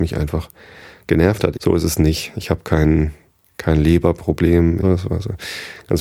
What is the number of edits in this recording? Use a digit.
2